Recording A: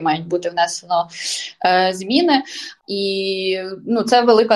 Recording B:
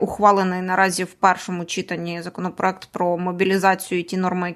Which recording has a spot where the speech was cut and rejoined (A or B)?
A